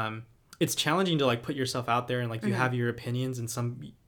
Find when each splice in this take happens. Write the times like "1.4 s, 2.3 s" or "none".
none